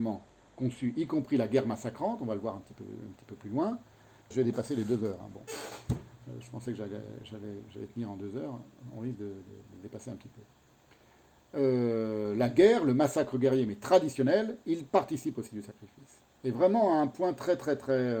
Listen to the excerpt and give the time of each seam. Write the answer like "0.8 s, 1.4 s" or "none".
4.3 s